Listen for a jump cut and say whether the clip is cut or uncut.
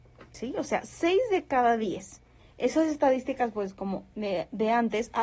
cut